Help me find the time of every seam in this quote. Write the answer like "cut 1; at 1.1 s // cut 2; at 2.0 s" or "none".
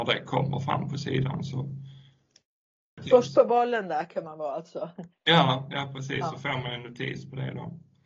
none